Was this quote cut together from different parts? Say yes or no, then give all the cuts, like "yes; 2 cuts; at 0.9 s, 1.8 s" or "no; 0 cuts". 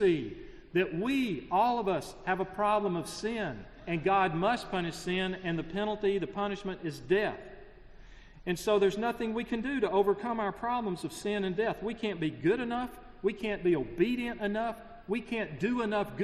no; 0 cuts